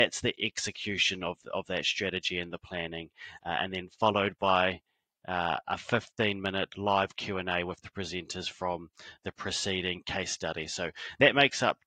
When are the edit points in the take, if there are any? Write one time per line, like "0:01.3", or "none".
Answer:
none